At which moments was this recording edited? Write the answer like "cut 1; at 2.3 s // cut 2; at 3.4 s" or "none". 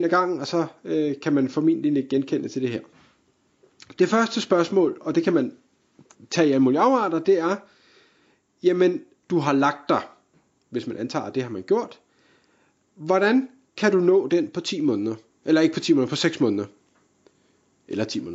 cut 1; at 9.2 s